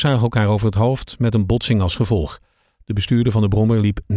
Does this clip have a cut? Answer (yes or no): no